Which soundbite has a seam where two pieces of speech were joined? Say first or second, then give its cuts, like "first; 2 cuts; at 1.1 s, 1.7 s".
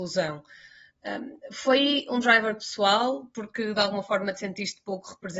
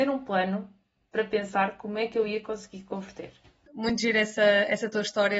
second; 1 cut; at 3.7 s